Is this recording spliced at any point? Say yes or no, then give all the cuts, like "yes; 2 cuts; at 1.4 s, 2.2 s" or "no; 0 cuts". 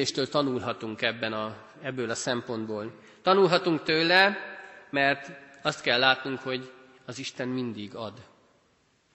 no; 0 cuts